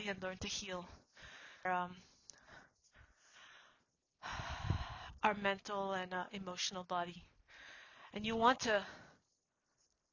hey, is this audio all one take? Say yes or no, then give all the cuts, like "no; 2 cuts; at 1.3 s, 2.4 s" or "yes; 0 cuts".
no; 2 cuts; at 1.7 s, 8.1 s